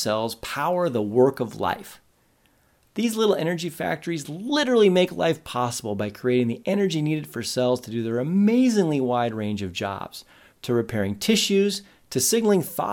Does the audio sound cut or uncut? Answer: cut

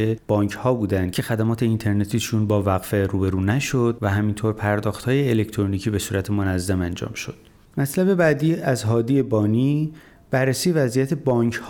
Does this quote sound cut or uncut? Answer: cut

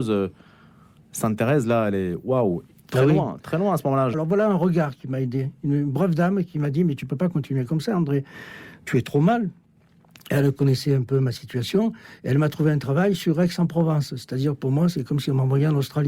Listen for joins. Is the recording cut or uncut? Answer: cut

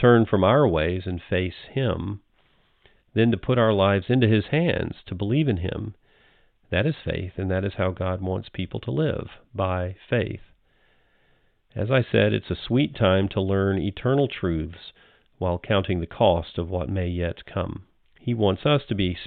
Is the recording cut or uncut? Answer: cut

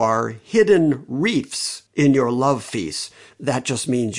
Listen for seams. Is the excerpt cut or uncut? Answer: cut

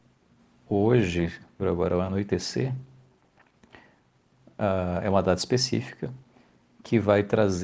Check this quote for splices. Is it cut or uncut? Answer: cut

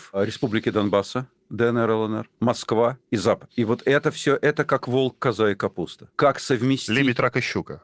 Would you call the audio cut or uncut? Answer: uncut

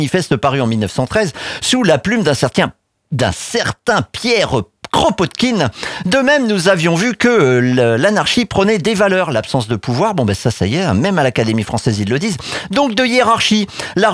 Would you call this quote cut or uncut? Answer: uncut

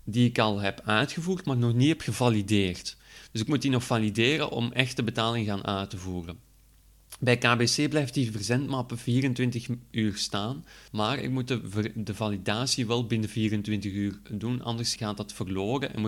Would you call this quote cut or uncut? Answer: cut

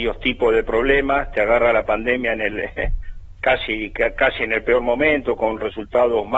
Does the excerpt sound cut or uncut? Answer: uncut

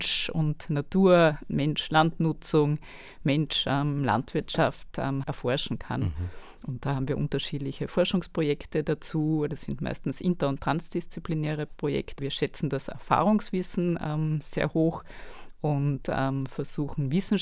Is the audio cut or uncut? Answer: cut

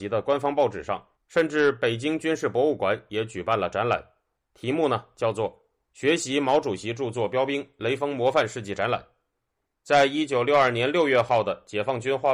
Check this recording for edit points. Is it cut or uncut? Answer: cut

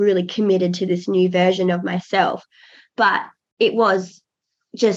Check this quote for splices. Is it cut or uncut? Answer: uncut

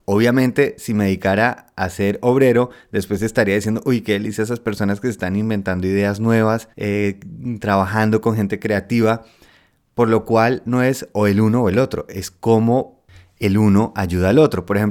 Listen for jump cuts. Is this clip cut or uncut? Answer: cut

